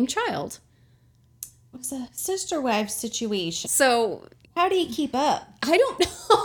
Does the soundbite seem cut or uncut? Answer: cut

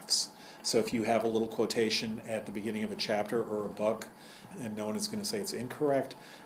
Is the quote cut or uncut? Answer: cut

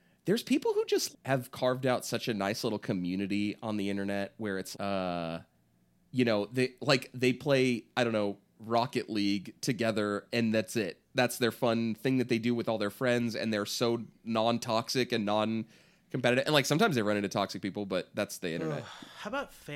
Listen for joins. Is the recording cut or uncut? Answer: cut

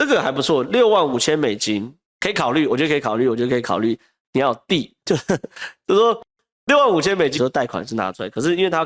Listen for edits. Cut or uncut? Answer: cut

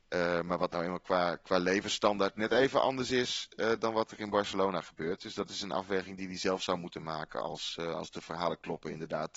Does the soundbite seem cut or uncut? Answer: uncut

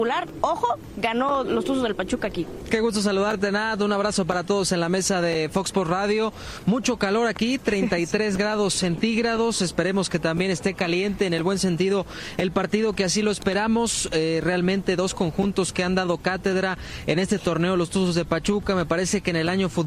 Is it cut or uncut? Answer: uncut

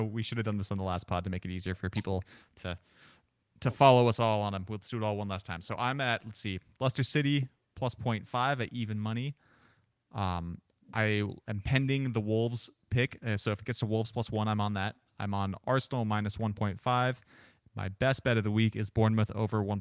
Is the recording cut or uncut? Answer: uncut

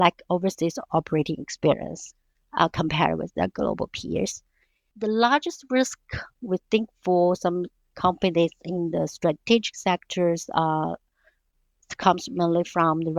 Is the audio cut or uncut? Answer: uncut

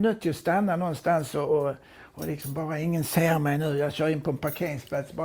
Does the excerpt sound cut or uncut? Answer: uncut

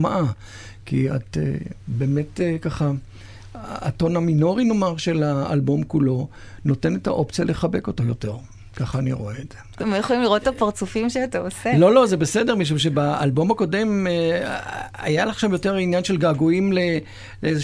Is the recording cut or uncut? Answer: cut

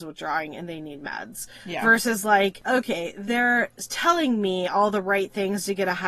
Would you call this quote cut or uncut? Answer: uncut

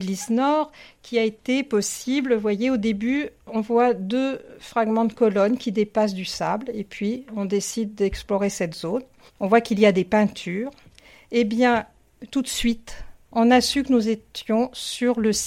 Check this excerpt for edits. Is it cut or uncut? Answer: cut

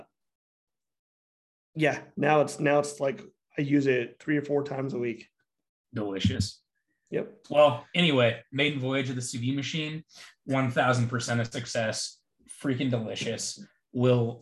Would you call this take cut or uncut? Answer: cut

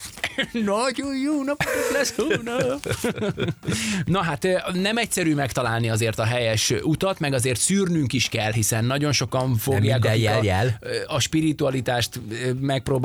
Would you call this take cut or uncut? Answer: uncut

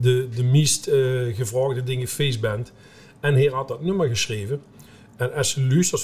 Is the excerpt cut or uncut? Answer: uncut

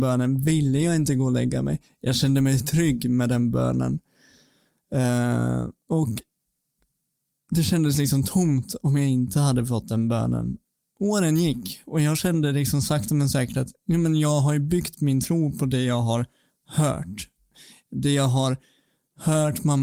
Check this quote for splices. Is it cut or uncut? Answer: uncut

